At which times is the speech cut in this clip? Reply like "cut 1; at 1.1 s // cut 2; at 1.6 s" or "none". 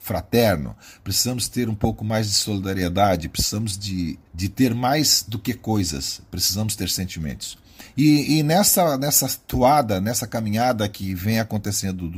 cut 1; at 4.3 s